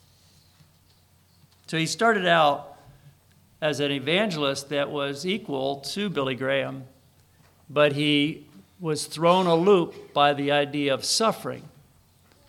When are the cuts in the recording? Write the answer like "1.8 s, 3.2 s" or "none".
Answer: none